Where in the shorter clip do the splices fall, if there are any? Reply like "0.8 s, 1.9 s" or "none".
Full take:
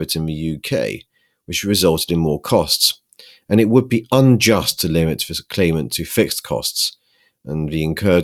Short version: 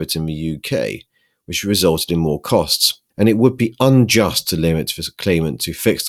3.1 s